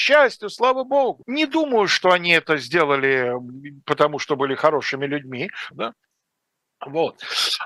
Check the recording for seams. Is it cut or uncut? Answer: cut